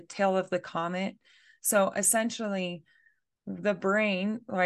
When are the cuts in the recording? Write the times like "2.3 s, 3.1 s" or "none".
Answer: none